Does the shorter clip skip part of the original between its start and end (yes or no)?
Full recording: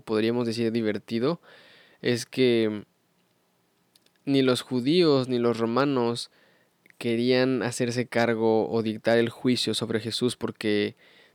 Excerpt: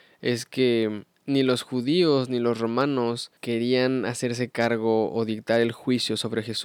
yes